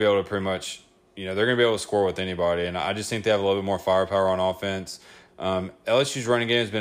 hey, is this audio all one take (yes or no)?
no